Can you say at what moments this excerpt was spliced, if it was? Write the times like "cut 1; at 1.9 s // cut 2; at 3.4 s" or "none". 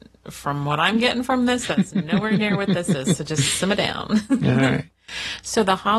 none